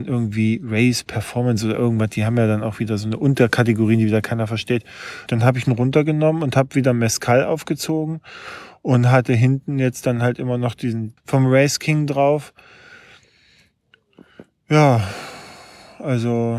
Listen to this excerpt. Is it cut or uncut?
cut